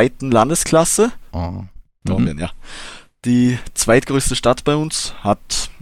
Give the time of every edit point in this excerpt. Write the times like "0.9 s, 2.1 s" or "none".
1.3 s